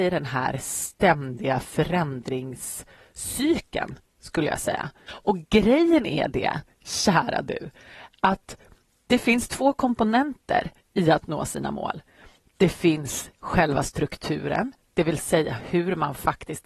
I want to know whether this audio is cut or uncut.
cut